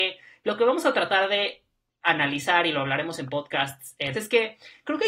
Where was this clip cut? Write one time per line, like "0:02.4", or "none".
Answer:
0:04.1